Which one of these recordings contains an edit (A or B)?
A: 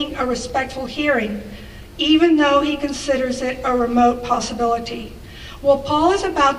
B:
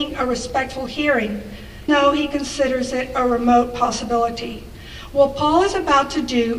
B